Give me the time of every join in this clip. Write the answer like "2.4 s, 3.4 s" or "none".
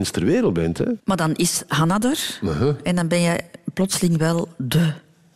1.0 s